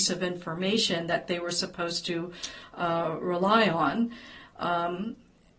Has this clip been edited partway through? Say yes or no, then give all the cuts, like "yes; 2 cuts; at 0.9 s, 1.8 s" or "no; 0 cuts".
no; 0 cuts